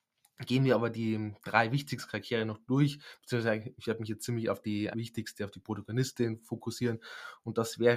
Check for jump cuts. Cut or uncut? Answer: cut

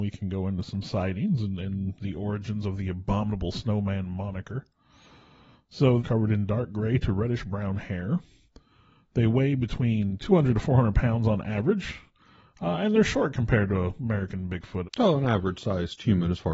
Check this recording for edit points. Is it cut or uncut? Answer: cut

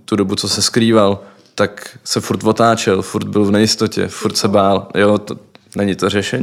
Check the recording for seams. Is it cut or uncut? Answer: uncut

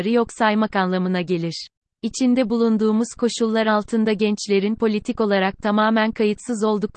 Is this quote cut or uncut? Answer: cut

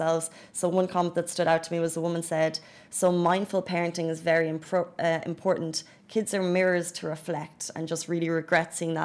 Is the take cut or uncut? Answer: uncut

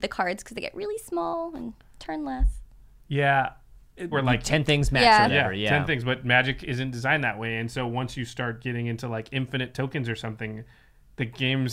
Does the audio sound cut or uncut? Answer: cut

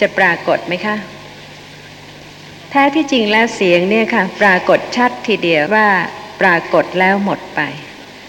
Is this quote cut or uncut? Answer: cut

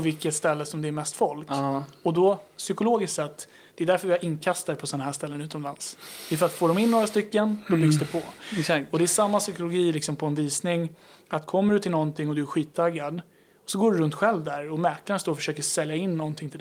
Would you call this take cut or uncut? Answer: uncut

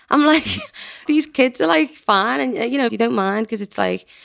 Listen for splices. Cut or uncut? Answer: cut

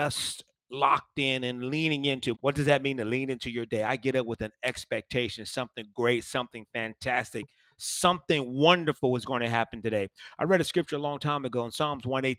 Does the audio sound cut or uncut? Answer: cut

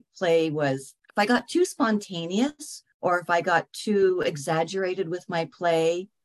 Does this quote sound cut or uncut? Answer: cut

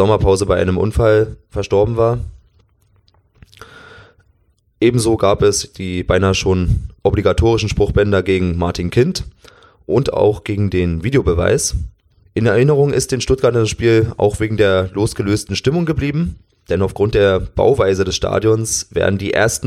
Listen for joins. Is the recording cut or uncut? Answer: uncut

